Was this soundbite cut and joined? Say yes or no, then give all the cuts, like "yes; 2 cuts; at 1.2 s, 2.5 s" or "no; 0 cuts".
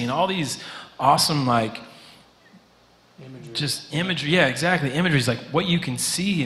no; 0 cuts